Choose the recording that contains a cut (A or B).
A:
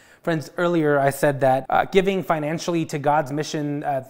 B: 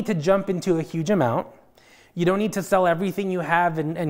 A